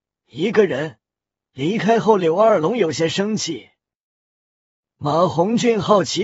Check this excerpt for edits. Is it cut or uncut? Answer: uncut